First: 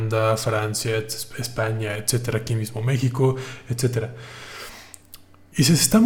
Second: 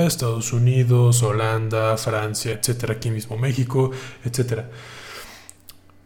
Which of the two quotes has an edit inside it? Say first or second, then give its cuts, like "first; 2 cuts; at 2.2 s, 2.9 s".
second; 1 cut; at 2.5 s